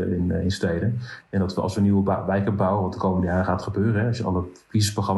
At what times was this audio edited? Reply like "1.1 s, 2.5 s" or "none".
none